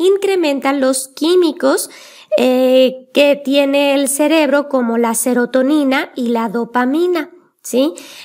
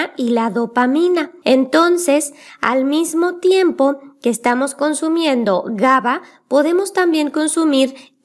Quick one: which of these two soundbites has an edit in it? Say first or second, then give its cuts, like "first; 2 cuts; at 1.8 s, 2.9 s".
second; 1 cut; at 1.4 s